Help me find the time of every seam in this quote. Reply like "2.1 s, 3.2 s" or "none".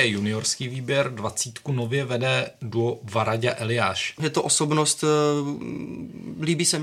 4.2 s